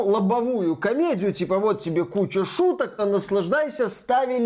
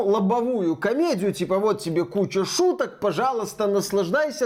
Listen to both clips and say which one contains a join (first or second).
first